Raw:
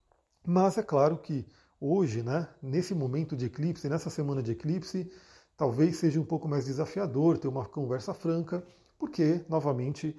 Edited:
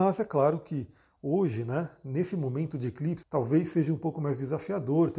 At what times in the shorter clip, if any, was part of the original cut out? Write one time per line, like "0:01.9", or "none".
0:03.2